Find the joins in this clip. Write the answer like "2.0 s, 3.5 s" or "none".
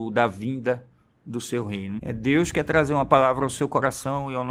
2.0 s